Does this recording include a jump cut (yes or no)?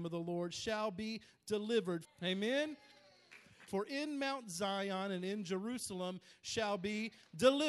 yes